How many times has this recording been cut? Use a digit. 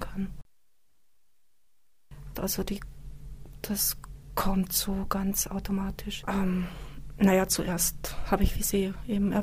2